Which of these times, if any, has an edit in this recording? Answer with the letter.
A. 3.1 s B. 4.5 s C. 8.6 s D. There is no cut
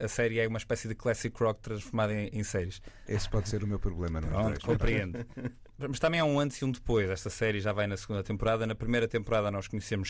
A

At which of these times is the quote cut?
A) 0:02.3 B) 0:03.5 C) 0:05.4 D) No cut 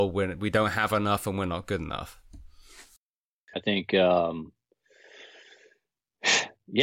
B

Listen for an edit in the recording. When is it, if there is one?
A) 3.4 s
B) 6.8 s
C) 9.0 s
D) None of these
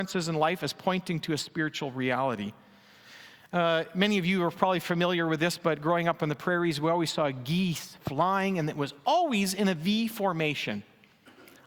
D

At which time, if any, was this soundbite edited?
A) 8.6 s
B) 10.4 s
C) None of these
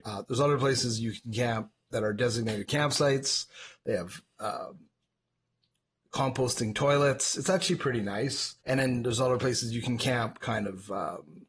A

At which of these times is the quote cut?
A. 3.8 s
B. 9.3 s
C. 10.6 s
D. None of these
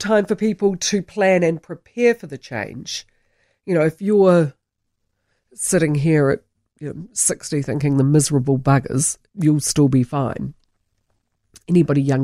B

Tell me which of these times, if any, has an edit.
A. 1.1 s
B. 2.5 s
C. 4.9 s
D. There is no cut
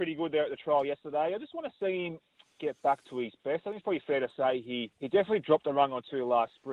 C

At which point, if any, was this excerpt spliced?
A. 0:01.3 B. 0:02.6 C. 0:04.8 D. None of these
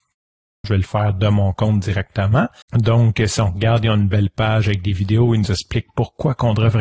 B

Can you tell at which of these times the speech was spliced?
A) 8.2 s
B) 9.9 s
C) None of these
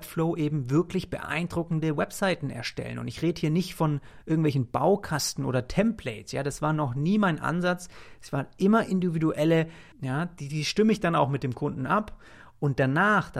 B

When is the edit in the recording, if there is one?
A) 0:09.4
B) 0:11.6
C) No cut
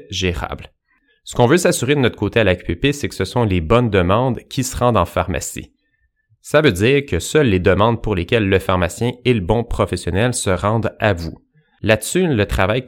C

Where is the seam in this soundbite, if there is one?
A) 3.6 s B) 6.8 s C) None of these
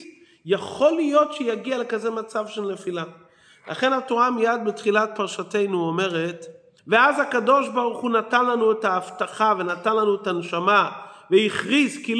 B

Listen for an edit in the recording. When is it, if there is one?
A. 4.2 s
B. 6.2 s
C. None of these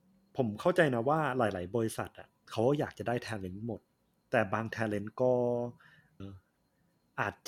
B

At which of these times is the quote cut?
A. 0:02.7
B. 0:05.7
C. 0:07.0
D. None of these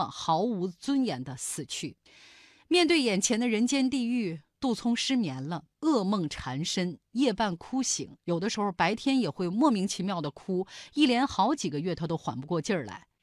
D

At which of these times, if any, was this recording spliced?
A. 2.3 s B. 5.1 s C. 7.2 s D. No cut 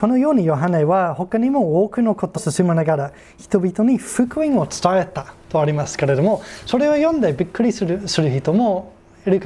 A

